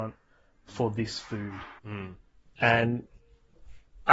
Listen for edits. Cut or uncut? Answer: cut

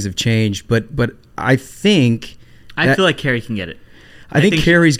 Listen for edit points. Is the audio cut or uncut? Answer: uncut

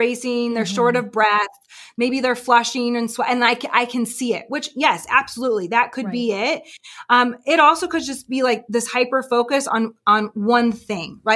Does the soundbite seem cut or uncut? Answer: uncut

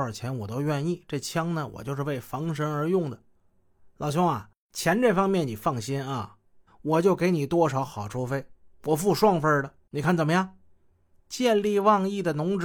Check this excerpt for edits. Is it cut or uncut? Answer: cut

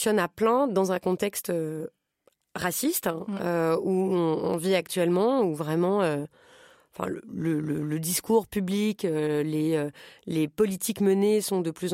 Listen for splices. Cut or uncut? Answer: uncut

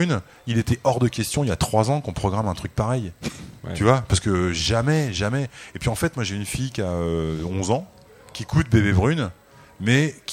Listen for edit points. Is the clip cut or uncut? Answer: uncut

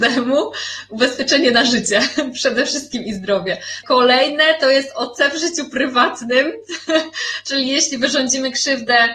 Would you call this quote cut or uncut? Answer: cut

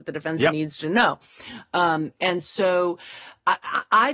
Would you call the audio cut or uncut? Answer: uncut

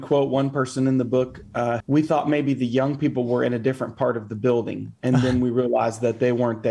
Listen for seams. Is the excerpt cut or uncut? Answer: cut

